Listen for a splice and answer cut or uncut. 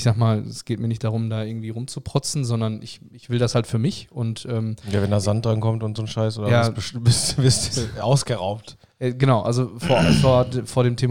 uncut